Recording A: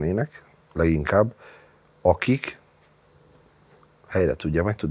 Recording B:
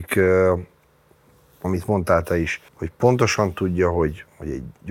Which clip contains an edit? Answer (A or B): B